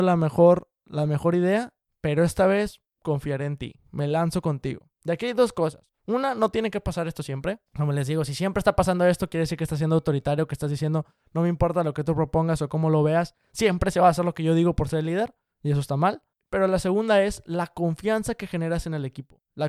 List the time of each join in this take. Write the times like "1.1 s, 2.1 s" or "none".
5.0 s, 7.7 s